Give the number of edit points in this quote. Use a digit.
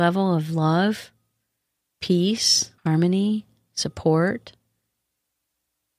1